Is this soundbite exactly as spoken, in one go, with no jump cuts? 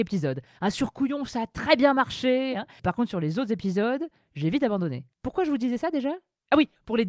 no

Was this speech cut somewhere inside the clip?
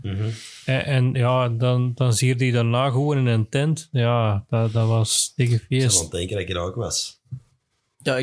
no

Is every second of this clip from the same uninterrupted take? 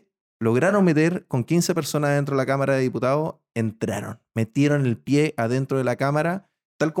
yes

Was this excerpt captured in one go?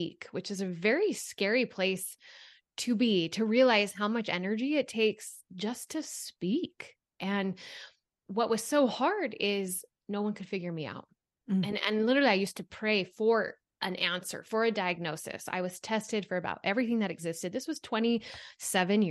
yes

